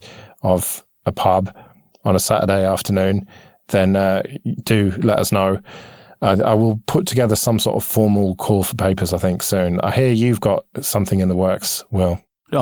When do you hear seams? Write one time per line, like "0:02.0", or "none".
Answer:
0:10.7